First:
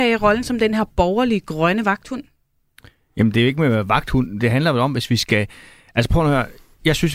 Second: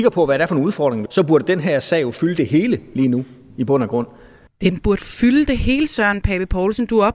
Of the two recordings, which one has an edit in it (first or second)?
second